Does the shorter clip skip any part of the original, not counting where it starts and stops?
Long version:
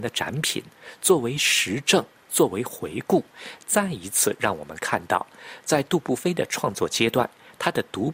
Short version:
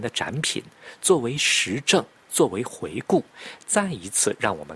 no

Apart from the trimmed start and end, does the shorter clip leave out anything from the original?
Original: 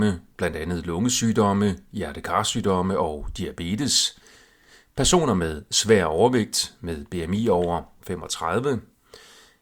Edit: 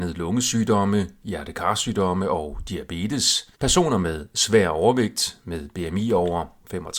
yes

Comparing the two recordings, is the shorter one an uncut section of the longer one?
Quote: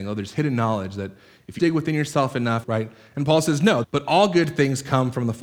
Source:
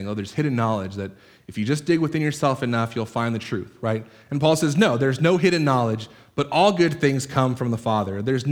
no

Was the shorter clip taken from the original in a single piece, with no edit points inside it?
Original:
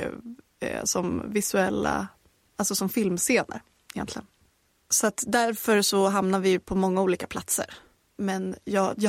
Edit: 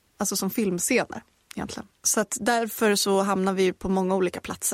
no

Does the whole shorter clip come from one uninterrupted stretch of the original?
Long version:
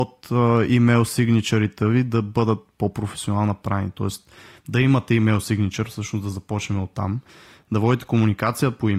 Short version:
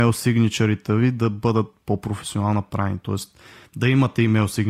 yes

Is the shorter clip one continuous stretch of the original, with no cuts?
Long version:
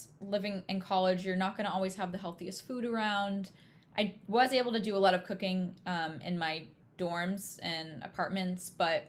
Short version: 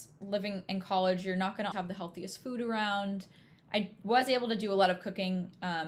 no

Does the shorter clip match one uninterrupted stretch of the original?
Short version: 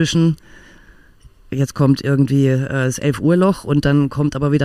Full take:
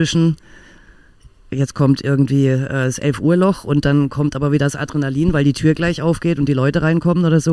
yes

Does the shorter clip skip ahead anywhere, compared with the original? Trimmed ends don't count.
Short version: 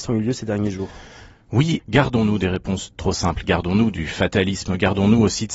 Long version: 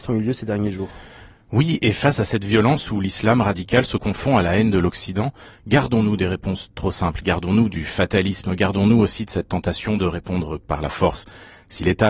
yes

